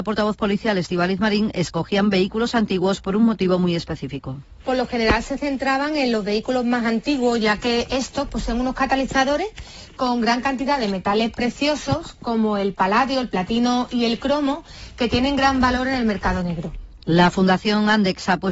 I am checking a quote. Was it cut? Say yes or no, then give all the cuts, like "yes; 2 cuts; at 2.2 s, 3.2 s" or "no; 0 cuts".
no; 0 cuts